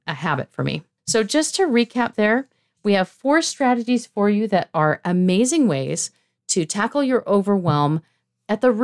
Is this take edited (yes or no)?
no